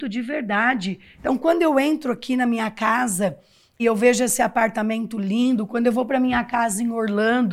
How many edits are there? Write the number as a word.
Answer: one